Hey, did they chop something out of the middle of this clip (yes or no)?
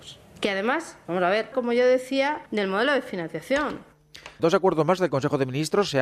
yes